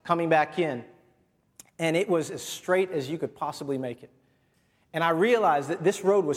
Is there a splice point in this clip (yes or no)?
no